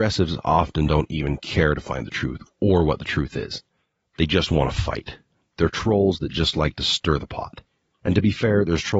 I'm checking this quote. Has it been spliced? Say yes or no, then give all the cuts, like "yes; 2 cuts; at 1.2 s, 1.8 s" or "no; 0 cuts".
no; 0 cuts